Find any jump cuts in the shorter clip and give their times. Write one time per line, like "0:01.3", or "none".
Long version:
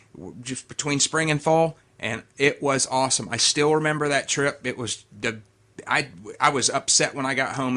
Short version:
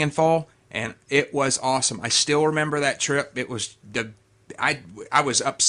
none